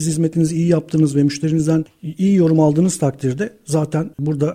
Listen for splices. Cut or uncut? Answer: uncut